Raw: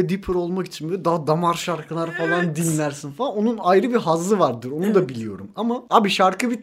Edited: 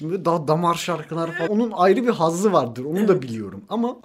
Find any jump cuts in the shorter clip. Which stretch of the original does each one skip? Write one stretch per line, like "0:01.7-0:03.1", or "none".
0:02.3-0:03.3